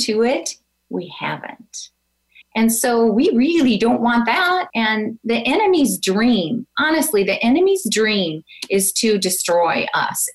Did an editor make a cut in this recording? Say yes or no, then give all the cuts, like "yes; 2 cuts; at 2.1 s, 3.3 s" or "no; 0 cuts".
yes; 2 cuts; at 2.4 s, 4.7 s